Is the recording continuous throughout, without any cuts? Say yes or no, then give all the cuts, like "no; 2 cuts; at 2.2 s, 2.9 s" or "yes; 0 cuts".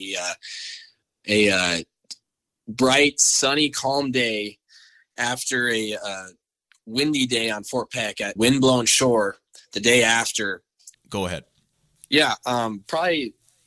no; 2 cuts; at 8.4 s, 10.9 s